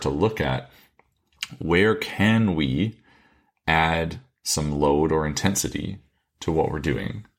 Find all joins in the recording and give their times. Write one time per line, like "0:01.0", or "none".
none